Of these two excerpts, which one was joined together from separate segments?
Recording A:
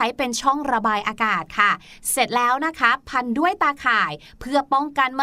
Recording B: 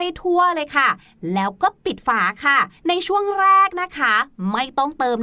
B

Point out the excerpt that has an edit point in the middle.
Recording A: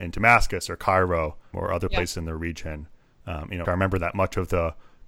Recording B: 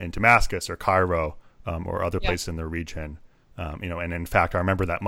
A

